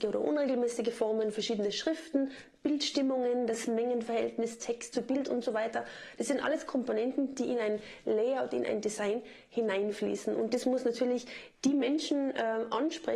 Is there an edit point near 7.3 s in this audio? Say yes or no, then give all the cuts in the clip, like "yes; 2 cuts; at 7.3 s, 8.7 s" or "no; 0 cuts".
no; 0 cuts